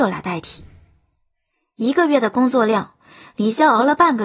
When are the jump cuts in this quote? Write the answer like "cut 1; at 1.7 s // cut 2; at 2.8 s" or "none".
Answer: none

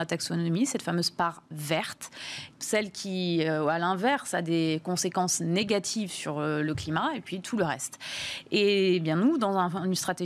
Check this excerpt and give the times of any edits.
cut 1; at 2.5 s

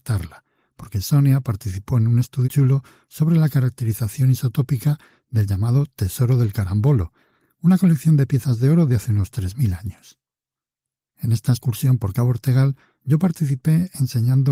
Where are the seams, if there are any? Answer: cut 1; at 2.4 s

